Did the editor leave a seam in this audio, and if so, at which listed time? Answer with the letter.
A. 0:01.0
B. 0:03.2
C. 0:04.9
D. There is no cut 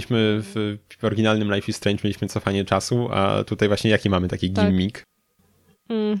D